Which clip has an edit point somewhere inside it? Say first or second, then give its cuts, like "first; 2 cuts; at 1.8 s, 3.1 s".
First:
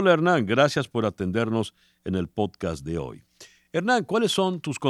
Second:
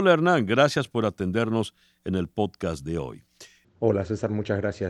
second; 1 cut; at 3.6 s